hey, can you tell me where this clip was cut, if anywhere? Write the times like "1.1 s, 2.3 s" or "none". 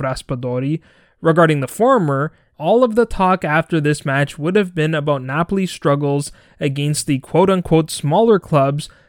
2.5 s